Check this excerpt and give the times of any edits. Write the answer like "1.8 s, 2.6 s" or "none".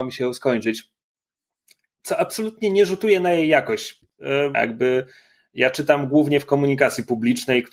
4.5 s